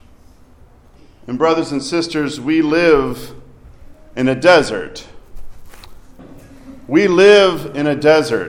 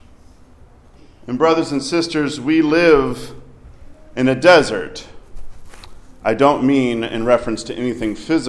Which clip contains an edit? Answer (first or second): first